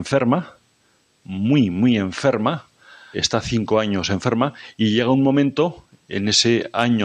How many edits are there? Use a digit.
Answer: 1